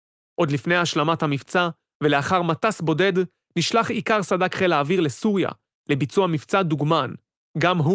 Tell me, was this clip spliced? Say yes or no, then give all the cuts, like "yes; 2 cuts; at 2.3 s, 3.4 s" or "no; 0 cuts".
no; 0 cuts